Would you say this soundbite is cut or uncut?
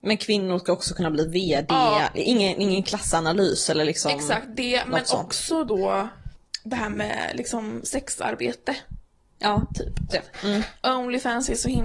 cut